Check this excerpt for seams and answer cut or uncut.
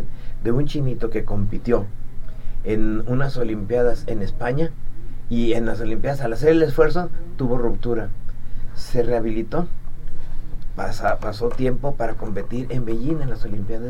uncut